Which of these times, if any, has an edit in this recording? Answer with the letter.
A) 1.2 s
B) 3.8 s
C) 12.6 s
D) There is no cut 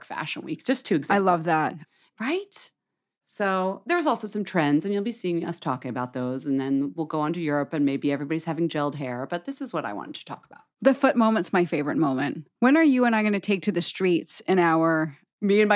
C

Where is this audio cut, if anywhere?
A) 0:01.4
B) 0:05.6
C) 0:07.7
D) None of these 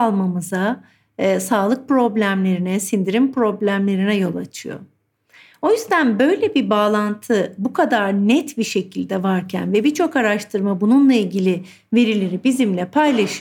D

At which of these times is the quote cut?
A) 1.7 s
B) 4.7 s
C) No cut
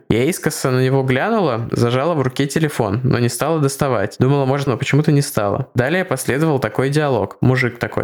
B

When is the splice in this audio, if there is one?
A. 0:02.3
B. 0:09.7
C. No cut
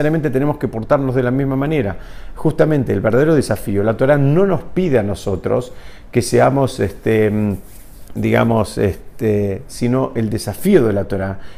B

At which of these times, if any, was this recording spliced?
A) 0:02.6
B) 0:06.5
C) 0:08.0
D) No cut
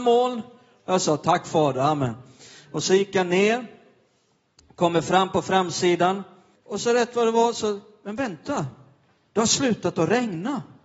B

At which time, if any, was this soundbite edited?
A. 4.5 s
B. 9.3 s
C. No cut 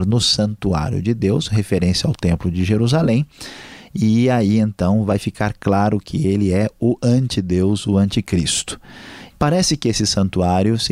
B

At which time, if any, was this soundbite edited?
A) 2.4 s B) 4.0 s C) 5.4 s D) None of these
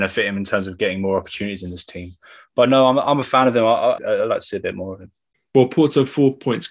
B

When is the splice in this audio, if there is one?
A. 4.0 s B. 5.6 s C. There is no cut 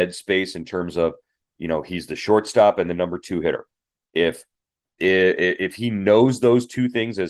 C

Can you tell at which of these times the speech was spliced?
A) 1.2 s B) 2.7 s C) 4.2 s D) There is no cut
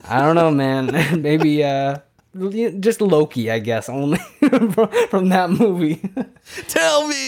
D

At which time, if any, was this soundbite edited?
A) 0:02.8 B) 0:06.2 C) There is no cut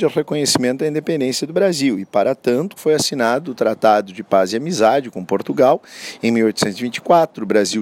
A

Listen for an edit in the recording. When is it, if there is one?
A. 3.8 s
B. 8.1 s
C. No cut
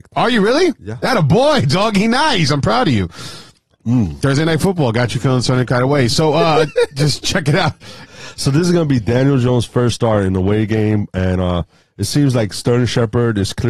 B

